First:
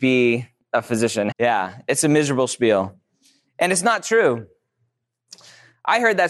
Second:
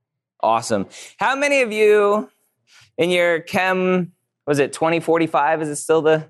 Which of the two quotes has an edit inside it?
first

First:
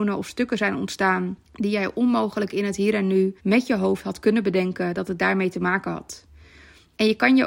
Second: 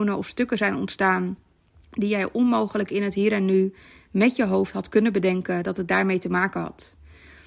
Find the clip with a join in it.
first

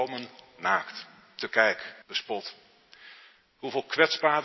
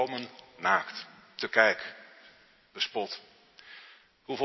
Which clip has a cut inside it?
first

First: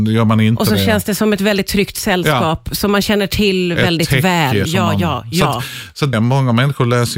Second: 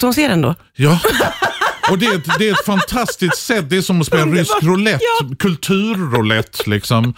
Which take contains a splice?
first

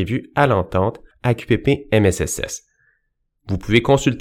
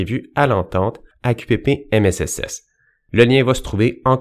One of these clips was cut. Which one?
second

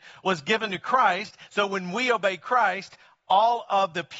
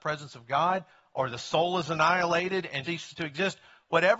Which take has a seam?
second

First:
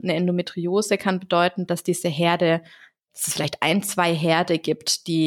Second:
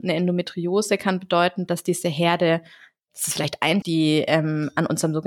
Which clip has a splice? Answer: second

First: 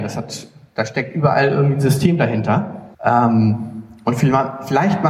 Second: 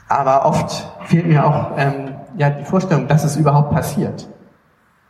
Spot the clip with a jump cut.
first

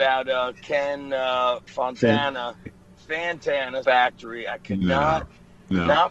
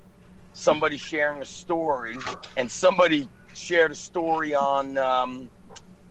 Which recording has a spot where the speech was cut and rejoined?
first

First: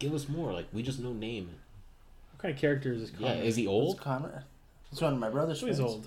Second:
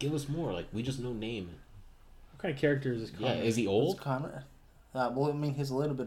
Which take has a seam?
first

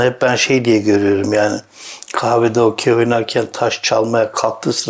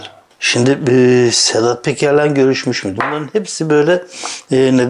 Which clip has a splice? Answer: second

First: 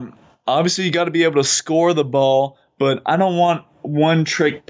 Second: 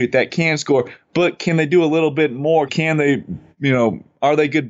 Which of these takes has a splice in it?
second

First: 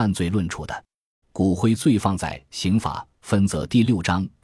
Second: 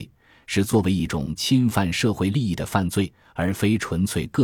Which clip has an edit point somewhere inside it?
first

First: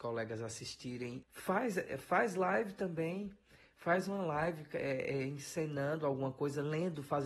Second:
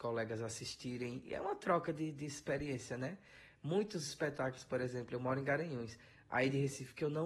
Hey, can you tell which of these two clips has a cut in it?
first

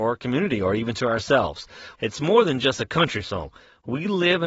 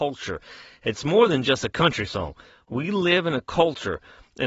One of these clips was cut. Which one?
first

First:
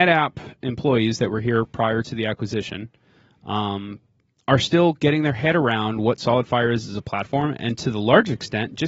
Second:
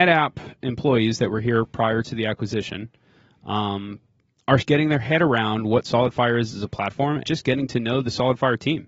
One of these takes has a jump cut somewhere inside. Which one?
second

